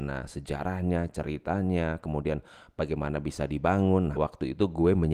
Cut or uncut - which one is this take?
cut